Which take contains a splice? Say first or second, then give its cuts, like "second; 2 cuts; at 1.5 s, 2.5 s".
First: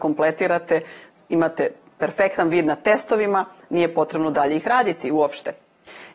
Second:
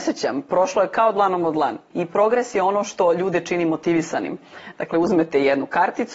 second; 2 cuts; at 1.9 s, 4.7 s